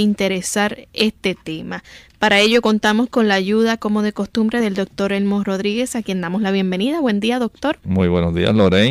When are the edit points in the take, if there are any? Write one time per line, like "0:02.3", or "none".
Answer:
none